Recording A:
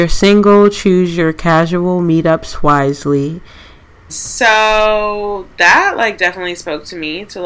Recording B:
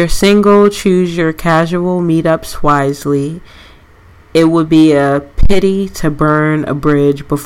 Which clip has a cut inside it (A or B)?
A